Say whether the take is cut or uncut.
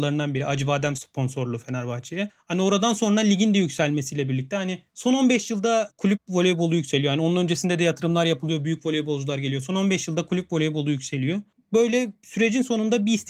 cut